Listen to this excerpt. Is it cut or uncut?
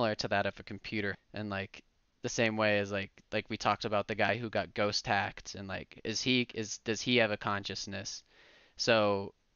cut